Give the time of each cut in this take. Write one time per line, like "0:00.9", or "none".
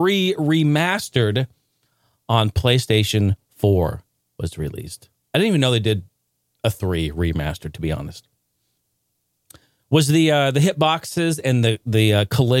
none